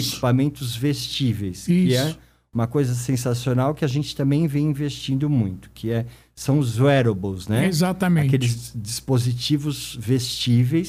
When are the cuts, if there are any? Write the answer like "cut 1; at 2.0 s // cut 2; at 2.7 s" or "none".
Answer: none